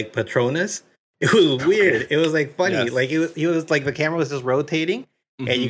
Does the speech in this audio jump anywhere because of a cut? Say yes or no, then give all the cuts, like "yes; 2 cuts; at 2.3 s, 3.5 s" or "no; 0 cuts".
no; 0 cuts